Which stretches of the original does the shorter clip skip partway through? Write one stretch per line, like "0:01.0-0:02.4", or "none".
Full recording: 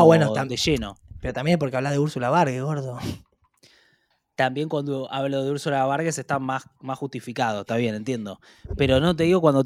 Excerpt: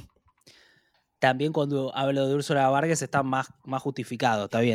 none